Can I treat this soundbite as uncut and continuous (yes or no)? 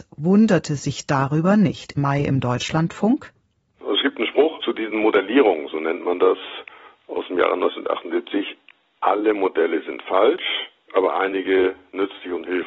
no